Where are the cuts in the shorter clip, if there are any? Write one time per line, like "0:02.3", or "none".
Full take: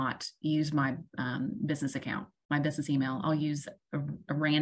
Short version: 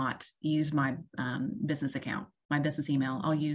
none